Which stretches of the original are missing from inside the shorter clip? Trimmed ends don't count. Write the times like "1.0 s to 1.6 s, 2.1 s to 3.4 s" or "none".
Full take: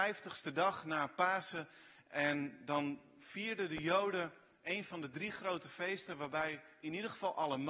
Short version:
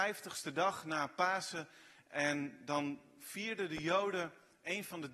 none